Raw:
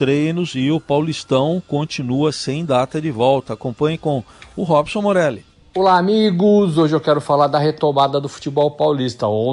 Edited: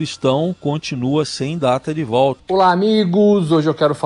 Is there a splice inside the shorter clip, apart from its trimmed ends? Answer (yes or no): yes